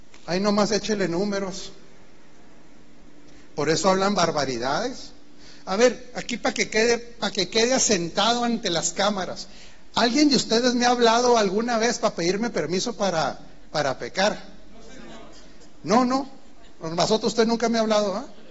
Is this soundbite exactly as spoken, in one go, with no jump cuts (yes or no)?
yes